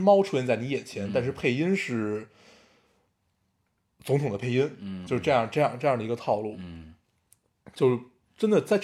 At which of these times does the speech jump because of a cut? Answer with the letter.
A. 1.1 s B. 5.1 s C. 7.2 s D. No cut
B